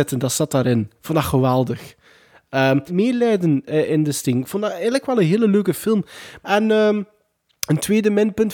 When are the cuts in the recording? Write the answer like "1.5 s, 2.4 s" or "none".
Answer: 2.9 s, 6.4 s